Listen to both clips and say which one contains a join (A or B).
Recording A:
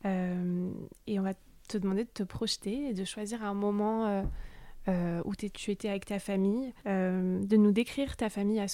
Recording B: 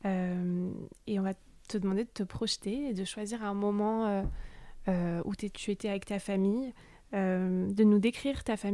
A